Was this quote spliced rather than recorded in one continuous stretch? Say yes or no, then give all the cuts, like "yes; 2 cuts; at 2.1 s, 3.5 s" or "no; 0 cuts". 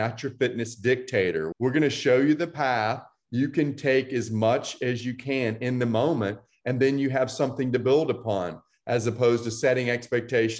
yes; 1 cut; at 1.5 s